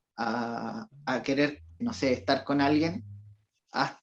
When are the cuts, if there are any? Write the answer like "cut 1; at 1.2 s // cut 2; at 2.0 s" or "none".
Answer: cut 1; at 1.8 s